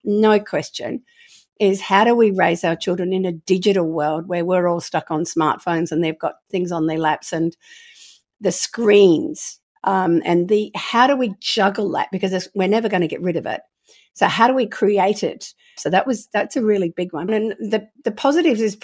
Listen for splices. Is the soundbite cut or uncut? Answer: cut